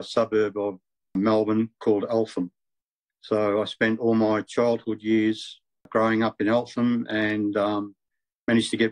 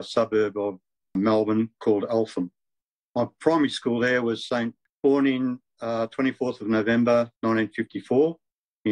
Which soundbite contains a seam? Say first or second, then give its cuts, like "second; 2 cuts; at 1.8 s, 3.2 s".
second; 3 cuts; at 3.1 s, 4.9 s, 7.4 s